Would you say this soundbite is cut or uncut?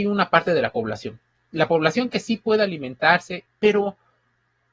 cut